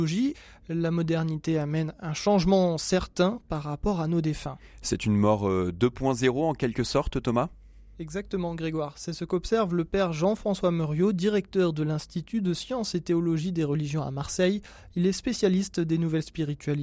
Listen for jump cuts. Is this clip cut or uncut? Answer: uncut